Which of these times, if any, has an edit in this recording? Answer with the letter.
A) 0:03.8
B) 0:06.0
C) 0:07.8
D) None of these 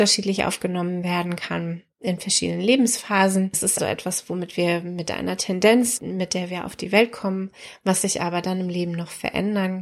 A